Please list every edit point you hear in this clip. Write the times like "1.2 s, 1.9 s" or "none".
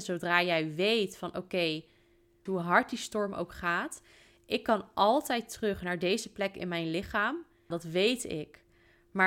2.5 s, 7.7 s